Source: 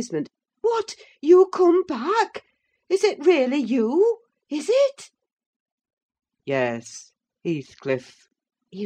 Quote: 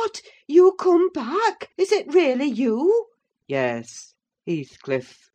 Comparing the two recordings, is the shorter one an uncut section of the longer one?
no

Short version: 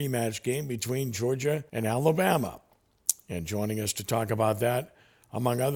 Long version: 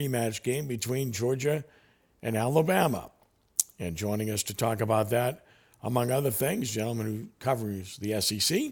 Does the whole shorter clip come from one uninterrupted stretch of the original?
no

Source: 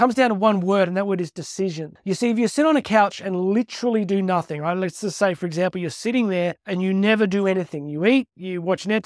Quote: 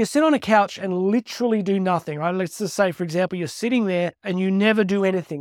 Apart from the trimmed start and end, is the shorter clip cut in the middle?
no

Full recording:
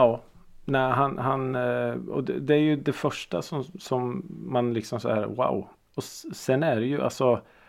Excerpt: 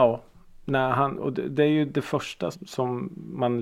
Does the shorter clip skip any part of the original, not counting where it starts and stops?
yes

